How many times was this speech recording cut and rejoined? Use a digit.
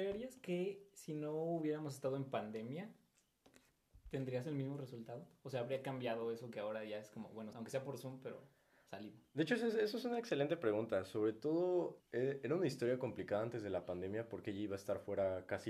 2